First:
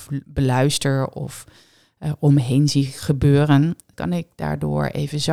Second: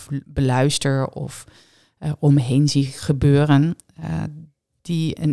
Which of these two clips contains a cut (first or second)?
first